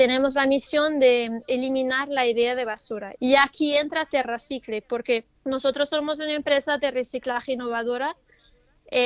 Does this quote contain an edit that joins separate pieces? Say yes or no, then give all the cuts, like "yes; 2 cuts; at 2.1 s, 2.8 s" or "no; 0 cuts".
yes; 2 cuts; at 3.2 s, 5.4 s